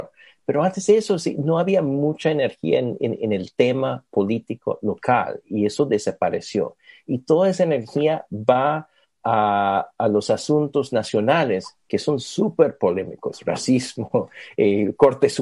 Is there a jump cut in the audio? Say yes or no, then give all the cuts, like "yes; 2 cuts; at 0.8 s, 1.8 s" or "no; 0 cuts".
no; 0 cuts